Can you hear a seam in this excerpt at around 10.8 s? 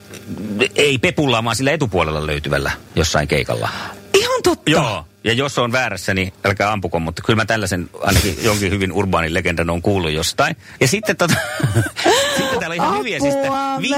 yes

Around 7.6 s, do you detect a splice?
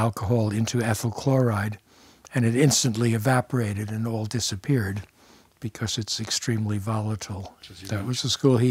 yes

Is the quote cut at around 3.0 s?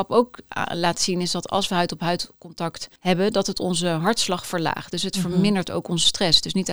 yes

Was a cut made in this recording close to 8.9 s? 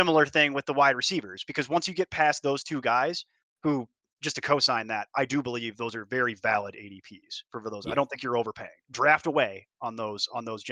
yes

